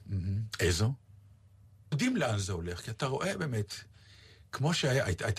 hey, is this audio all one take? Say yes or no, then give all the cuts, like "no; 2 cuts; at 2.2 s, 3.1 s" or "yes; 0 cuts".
no; 1 cut; at 1.9 s